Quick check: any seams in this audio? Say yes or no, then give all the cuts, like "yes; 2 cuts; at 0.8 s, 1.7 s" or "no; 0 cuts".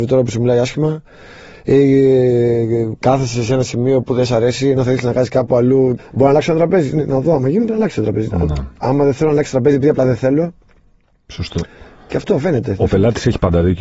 yes; 1 cut; at 6.0 s